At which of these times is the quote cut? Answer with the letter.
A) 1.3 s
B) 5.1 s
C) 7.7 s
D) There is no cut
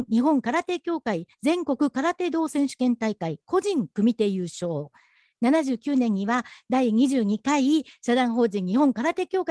D